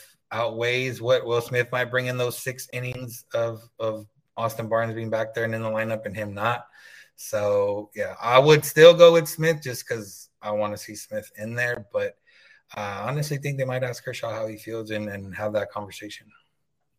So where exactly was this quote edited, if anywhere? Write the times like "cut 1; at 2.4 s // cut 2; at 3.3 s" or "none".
none